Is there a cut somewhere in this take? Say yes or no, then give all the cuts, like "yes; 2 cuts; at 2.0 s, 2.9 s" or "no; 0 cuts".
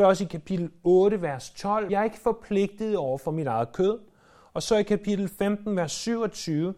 yes; 1 cut; at 1.9 s